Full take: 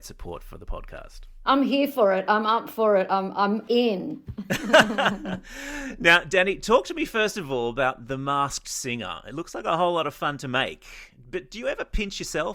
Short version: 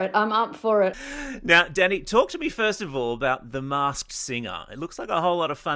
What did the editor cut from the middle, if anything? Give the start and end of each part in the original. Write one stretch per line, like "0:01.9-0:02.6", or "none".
0:03.1-0:05.5